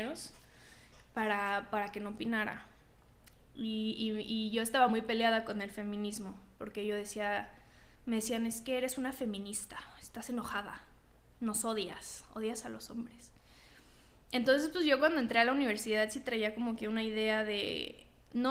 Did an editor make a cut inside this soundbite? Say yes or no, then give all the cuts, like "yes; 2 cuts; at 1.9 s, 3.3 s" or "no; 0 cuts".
no; 0 cuts